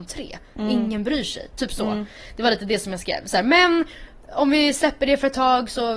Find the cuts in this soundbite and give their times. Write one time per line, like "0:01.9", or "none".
none